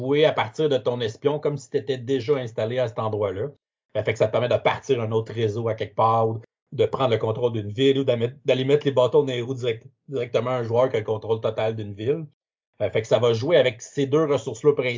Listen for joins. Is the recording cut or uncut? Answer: uncut